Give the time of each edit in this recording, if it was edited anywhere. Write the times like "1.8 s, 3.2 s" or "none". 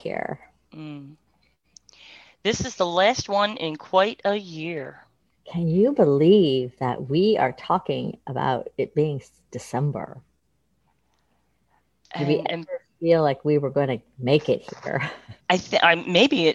15.4 s